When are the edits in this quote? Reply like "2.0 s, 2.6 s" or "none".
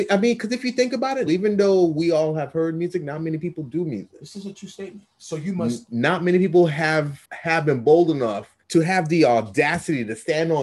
1.3 s, 7.2 s, 8.6 s